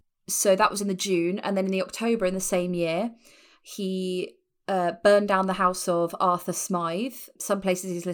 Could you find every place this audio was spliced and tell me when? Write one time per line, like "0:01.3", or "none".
none